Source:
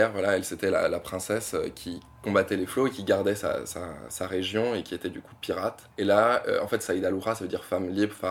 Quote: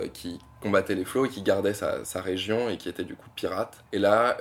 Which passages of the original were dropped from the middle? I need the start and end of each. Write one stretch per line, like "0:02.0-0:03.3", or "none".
0:03.6-0:04.1